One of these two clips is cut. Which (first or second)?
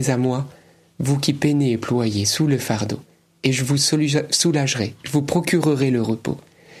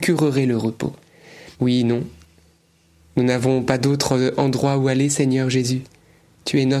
second